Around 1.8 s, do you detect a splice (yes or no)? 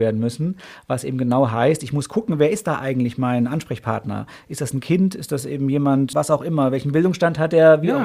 no